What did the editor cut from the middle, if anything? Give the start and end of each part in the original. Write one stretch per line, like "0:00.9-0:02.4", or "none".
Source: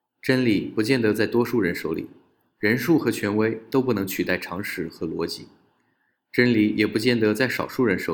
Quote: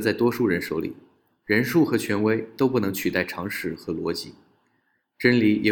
none